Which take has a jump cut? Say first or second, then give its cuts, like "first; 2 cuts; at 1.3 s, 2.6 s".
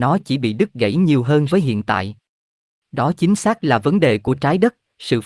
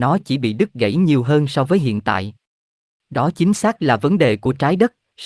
first; 1 cut; at 1.5 s